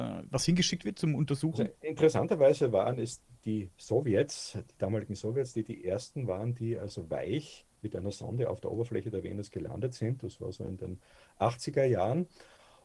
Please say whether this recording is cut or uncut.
uncut